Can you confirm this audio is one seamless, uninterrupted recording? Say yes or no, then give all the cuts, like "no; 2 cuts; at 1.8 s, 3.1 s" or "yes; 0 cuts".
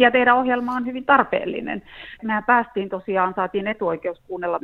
no; 1 cut; at 2.2 s